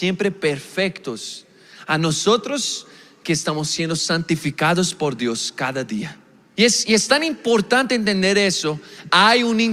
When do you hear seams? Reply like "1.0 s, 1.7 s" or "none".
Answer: 6.6 s

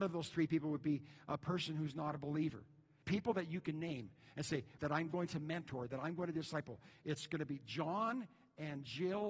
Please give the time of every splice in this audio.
3.0 s, 4.8 s

